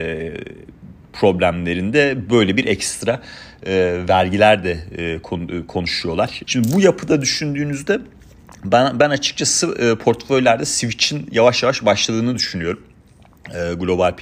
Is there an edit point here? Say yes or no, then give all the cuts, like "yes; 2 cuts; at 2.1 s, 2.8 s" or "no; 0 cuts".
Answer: yes; 1 cut; at 6.4 s